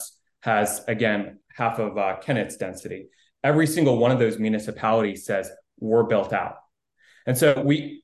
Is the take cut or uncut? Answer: cut